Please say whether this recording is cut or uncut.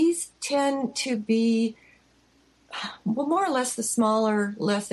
uncut